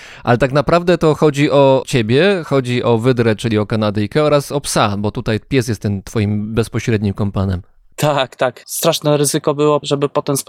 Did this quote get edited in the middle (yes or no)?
yes